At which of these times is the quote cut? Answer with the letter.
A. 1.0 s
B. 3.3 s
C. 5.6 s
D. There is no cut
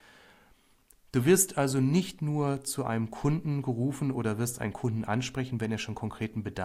A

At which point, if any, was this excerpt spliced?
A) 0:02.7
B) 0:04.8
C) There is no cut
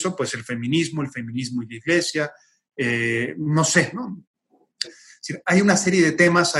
B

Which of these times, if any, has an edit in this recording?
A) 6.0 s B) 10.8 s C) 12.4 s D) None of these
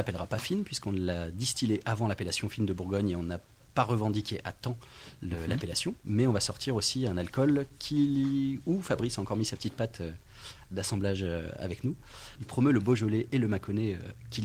C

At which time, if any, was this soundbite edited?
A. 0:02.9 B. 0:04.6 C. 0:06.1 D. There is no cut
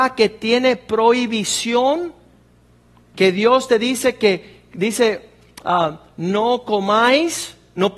D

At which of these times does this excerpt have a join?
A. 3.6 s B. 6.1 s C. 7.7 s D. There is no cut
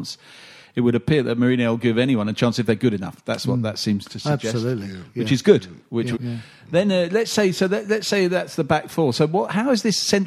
B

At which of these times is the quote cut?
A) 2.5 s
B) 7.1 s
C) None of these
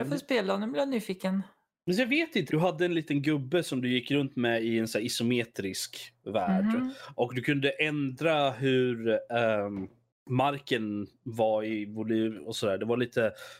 A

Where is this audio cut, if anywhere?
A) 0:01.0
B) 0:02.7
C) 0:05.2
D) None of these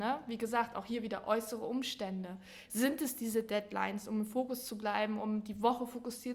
D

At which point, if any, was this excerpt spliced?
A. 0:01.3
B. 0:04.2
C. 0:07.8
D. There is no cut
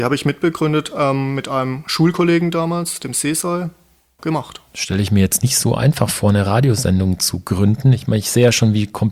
B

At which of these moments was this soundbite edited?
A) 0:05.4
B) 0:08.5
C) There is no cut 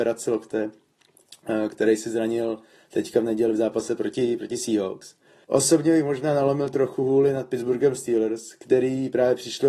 A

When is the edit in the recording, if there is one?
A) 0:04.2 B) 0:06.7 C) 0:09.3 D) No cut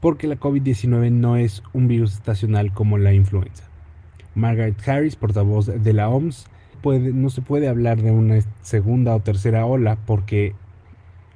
B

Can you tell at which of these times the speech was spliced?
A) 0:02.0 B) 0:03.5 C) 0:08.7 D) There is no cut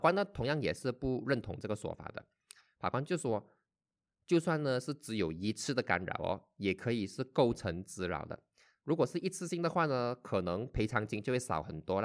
C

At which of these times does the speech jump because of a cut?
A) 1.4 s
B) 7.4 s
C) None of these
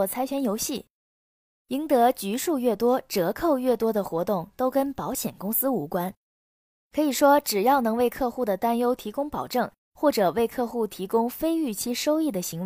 C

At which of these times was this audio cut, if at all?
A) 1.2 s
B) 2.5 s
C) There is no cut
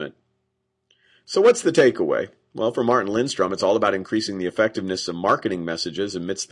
C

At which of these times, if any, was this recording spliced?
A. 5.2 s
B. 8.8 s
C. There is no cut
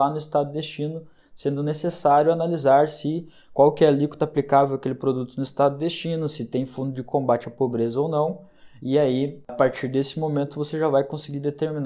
C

